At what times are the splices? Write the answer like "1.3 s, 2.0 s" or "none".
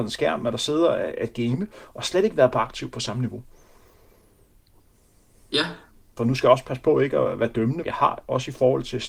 6.2 s, 7.8 s

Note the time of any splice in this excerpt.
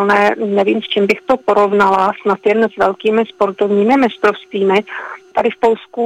none

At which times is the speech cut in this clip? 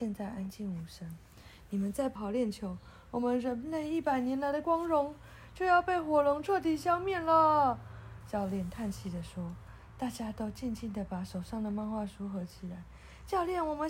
2.2 s

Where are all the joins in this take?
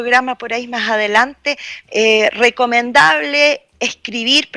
1.9 s

